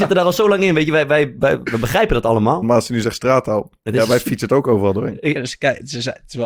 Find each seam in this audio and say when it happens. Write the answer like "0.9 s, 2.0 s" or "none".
2.6 s, 5.3 s